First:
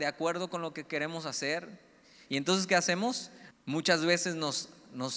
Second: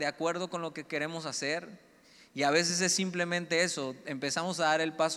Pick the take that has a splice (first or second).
first